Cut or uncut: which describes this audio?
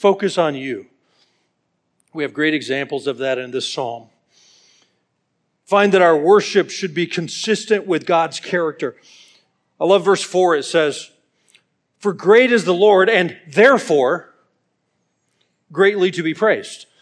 uncut